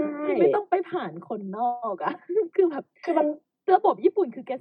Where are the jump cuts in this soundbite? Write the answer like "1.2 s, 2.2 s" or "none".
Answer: none